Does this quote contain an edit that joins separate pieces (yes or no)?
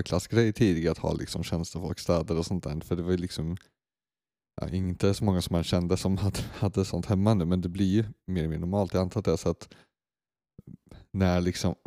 no